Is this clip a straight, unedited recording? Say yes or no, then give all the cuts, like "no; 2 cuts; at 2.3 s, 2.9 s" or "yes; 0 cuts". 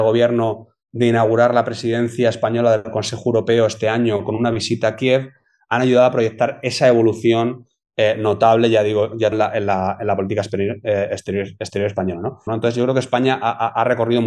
no; 2 cuts; at 9.3 s, 12.5 s